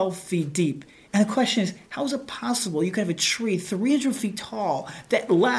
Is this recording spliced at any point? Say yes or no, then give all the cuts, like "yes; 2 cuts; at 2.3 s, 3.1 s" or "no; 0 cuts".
no; 0 cuts